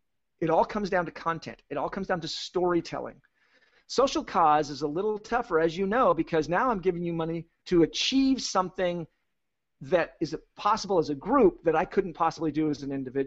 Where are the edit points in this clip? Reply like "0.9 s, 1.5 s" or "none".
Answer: 3.7 s

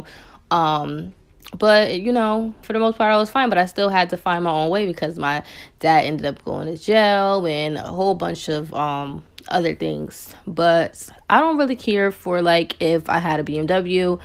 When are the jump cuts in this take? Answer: 2.6 s

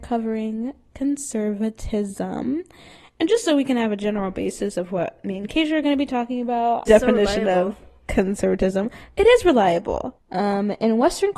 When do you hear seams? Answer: 6.9 s, 10.2 s

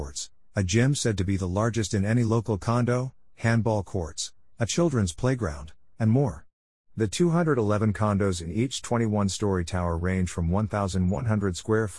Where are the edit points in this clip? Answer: 6.8 s

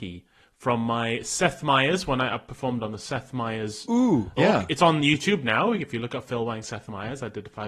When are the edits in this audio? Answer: 4.4 s

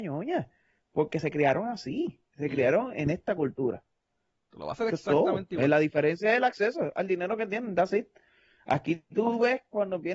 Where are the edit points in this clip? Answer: 4.5 s

